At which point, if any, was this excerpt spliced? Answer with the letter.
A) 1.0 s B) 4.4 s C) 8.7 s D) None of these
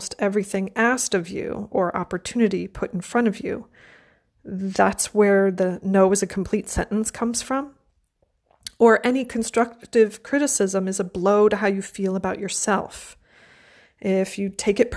D